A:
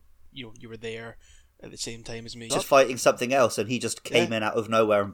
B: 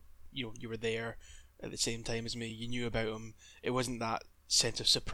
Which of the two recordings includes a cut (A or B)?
A